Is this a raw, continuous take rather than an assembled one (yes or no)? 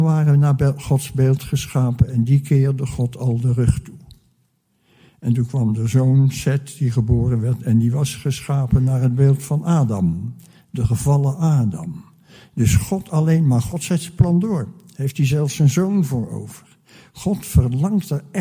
yes